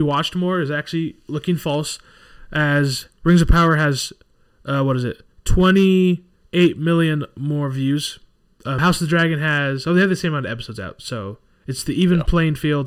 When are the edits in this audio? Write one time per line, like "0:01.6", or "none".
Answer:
0:08.8